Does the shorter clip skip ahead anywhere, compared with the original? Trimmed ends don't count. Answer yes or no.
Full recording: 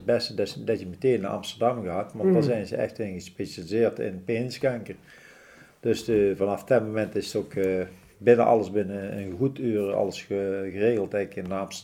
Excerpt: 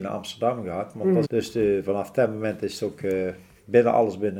yes